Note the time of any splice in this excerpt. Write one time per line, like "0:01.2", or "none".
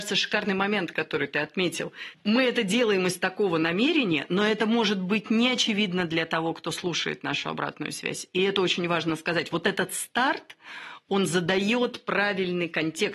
none